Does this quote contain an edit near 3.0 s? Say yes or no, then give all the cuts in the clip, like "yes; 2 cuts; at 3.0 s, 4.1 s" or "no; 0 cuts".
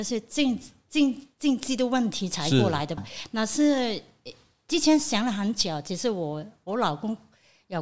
yes; 1 cut; at 3.0 s